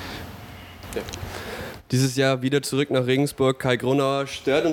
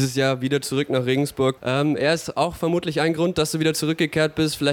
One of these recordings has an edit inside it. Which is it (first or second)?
second